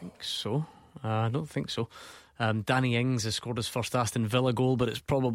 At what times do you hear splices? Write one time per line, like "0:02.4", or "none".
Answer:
none